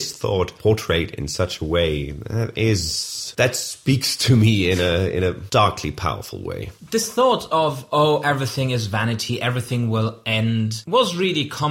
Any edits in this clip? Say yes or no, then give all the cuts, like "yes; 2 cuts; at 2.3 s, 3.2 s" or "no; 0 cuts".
no; 0 cuts